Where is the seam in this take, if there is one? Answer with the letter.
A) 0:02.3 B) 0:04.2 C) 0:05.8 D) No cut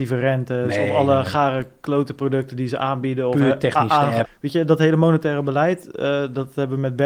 B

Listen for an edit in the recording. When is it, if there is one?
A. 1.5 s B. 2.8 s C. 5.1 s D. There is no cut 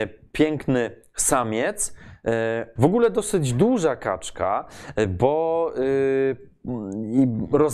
B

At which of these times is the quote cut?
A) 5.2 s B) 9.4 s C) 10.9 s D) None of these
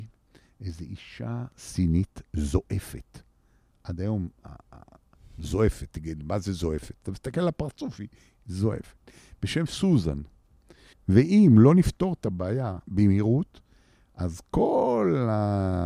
C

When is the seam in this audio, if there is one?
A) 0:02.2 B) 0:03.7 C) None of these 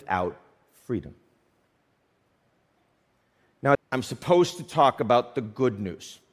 B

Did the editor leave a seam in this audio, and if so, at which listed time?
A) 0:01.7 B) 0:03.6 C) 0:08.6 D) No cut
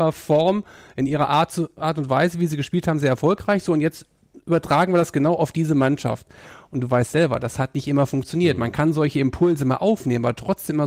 D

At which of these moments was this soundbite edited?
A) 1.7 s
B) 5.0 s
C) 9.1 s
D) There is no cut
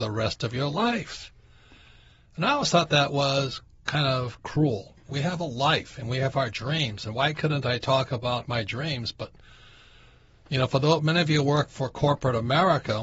D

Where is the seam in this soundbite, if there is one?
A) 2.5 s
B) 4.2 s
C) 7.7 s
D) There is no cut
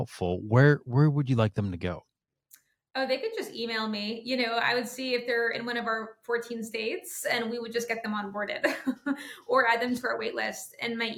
D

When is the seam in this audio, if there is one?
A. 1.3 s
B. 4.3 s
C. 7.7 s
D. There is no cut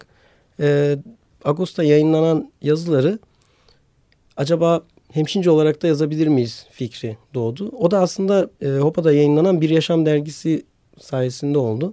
A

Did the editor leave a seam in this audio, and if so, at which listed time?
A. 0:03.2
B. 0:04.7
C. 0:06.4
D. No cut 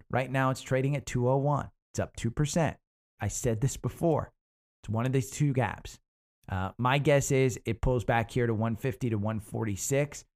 A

